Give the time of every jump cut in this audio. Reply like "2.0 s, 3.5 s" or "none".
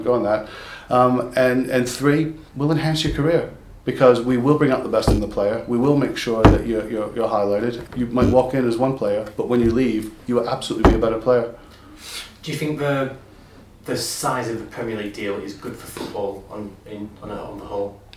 2.5 s, 7.9 s

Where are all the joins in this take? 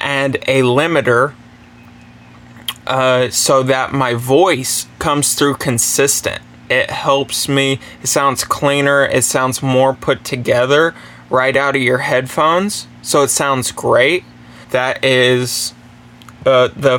6.7 s, 14.6 s

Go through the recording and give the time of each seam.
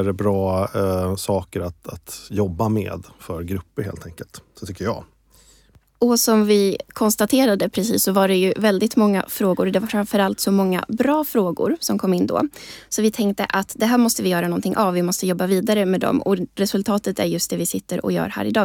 none

